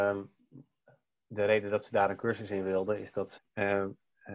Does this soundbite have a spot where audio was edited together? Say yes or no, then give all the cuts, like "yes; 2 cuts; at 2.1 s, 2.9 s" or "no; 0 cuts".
yes; 1 cut; at 3.4 s